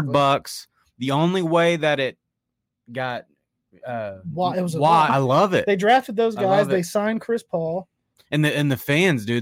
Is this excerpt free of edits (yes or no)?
no